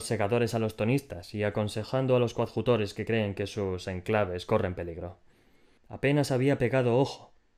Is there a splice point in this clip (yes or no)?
yes